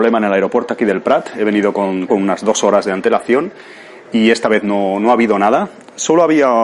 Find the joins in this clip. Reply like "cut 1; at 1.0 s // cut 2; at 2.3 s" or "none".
cut 1; at 2.1 s